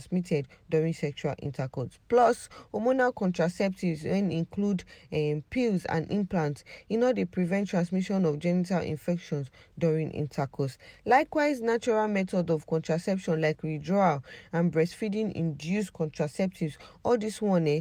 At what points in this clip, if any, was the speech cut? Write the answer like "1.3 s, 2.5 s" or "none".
none

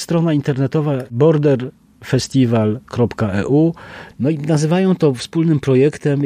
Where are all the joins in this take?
4.1 s

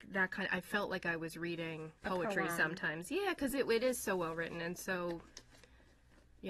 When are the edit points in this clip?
2.0 s

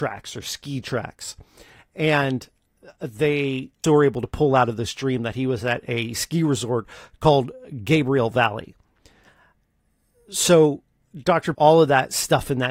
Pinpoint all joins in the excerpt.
3.8 s, 11.5 s

